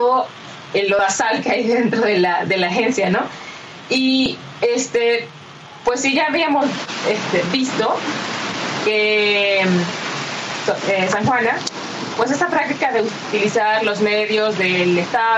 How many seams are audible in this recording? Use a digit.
0